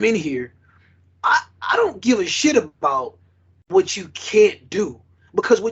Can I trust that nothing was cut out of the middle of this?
yes; 0 cuts

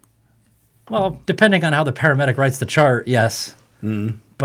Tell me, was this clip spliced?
yes; 1 cut; at 1.2 s

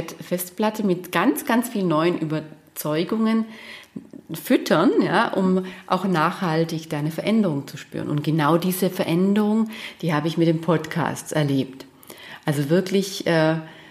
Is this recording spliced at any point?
no; 0 cuts

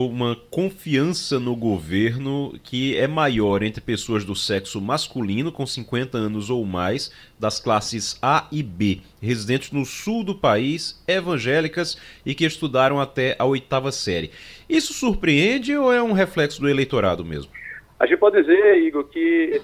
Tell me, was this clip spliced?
no; 0 cuts

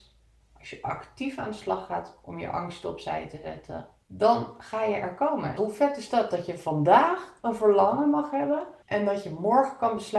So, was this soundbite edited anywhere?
yes; 3 cuts; at 4.0 s, 5.6 s, 8.8 s

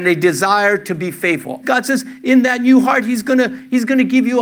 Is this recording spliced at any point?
yes; 1 cut; at 1.6 s

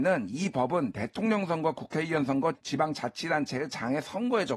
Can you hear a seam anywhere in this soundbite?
yes; 1 cut; at 2.5 s

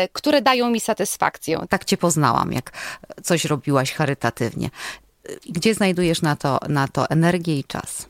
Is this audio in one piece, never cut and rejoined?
no; 1 cut; at 1.7 s

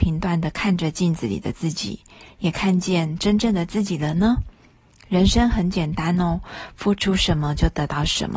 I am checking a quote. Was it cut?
no; 0 cuts

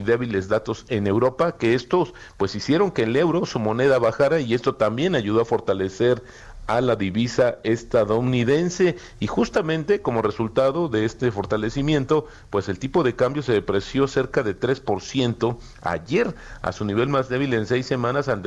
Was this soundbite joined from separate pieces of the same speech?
no; 0 cuts

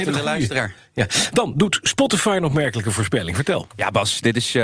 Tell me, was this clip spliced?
no; 0 cuts

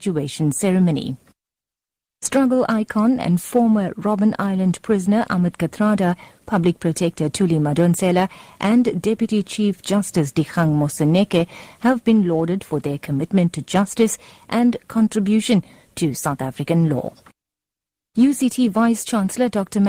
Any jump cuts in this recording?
no; 0 cuts

